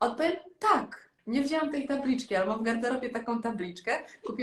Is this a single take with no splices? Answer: no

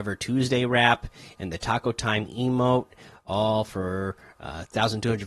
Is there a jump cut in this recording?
no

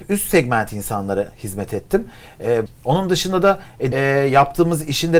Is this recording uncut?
no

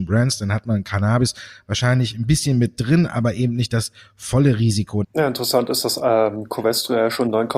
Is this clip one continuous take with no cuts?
no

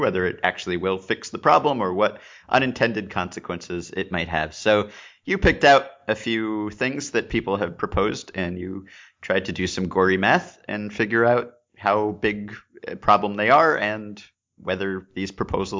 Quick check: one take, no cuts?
yes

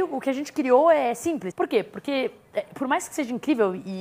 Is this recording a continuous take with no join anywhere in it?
no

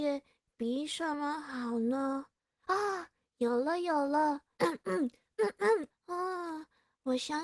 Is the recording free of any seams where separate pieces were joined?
no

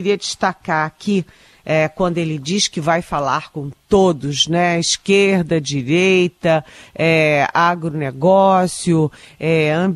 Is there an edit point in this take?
no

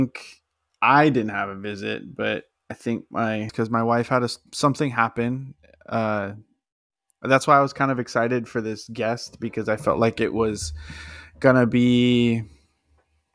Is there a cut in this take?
yes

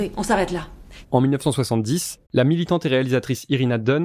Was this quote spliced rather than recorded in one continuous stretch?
yes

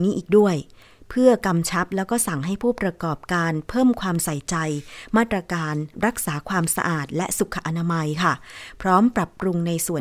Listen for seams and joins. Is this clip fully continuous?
yes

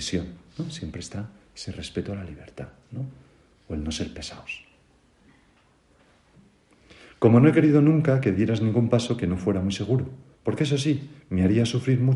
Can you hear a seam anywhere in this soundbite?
no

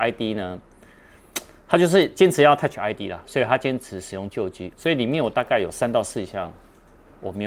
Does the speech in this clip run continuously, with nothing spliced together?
no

